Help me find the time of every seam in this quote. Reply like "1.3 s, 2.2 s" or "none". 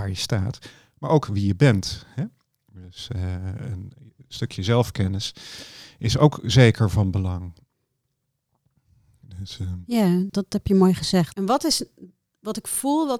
10.3 s, 11.3 s